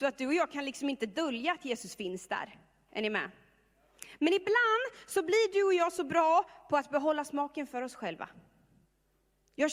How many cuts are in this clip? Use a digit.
1